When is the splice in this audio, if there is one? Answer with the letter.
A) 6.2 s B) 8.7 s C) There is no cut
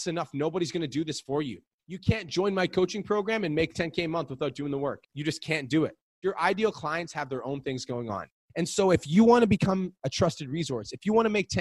A